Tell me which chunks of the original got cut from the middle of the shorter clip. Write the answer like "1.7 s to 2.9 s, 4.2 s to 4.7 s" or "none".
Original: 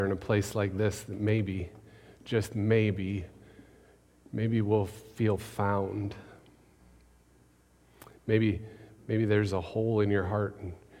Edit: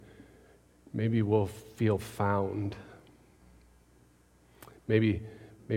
none